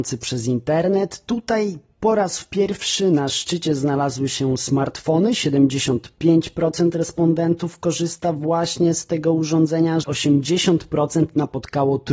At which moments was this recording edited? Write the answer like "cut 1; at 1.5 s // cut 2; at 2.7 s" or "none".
cut 1; at 10.0 s